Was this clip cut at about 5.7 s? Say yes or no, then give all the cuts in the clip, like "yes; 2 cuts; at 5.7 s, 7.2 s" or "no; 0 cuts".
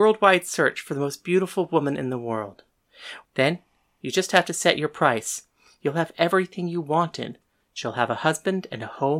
no; 1 cut; at 3.2 s